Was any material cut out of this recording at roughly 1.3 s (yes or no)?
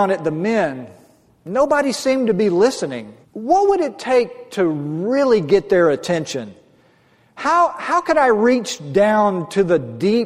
no